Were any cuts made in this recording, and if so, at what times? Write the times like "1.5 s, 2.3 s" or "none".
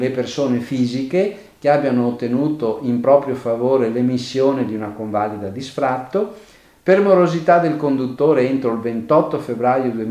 none

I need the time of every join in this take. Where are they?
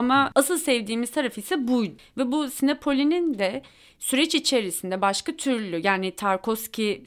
none

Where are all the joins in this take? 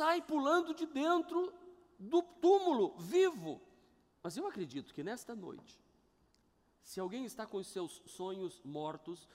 4.1 s

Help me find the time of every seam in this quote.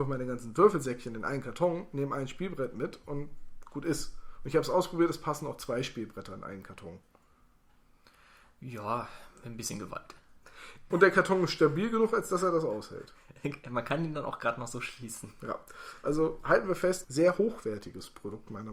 10.9 s, 17.0 s

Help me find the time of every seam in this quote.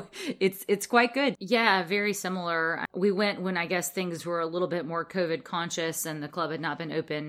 1.3 s

